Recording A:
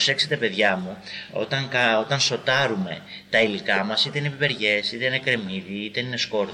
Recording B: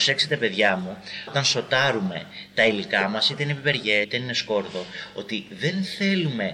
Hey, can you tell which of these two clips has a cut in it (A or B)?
B